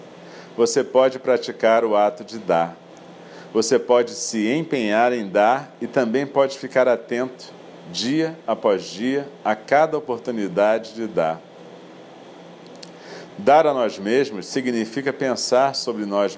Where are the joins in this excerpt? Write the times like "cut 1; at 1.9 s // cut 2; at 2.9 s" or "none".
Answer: cut 1; at 13.3 s